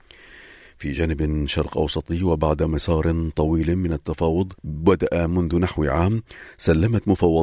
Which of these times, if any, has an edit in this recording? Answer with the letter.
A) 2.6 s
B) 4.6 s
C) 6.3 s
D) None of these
B